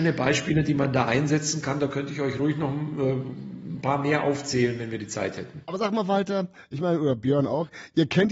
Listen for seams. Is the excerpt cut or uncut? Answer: uncut